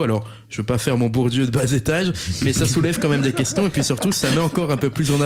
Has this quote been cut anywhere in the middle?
no; 0 cuts

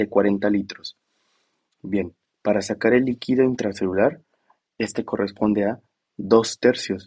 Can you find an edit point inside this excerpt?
no; 0 cuts

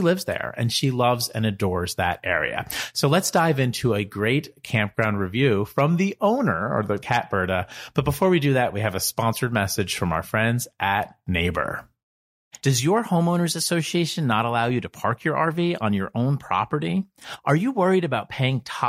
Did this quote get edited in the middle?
yes; 2 cuts; at 7.0 s, 12.6 s

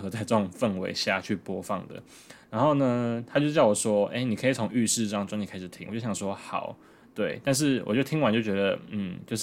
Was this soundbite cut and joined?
no; 0 cuts

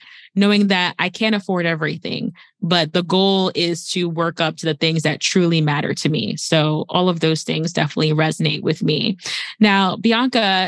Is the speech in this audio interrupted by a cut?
no; 0 cuts

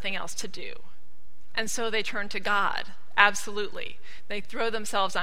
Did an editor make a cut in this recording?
no; 0 cuts

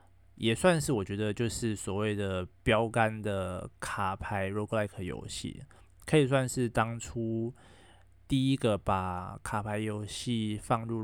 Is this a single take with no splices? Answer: yes; 0 cuts

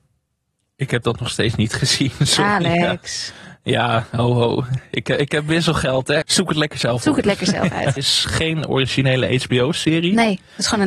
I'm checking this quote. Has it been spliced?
yes; 2 cuts; at 6.2 s, 8.0 s

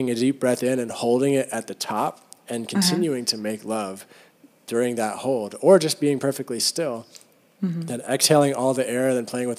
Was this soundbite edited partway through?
no; 0 cuts

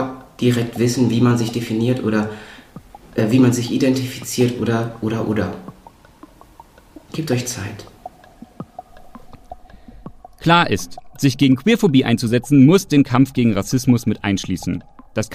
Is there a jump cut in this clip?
no; 0 cuts

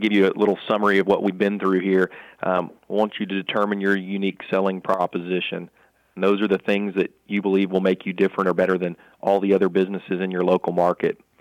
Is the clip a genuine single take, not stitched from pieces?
yes; 0 cuts

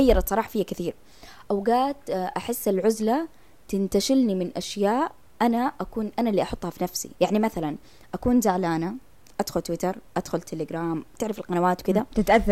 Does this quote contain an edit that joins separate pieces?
yes; 2 cuts; at 7.2 s, 10.1 s

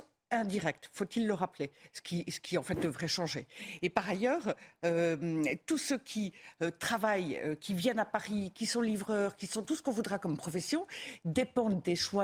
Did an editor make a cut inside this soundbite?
no; 0 cuts

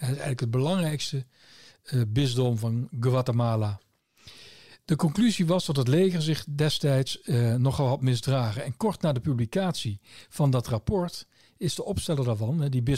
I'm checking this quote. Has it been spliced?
no; 0 cuts

